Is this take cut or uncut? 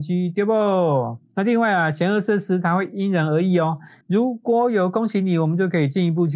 cut